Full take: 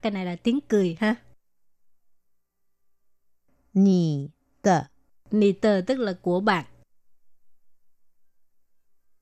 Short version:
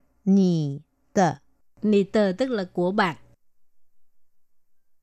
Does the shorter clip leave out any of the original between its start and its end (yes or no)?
no